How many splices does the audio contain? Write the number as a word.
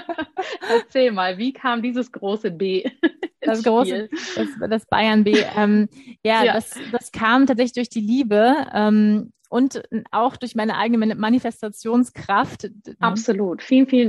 one